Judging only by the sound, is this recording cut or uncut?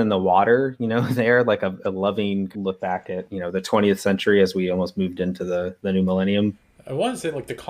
uncut